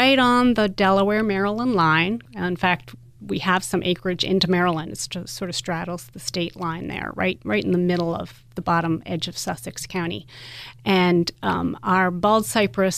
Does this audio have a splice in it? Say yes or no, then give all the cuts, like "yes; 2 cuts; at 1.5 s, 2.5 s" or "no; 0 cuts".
no; 0 cuts